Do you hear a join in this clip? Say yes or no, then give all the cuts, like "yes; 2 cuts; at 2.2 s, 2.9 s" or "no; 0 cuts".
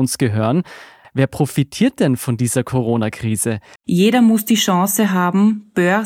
yes; 2 cuts; at 1.0 s, 3.8 s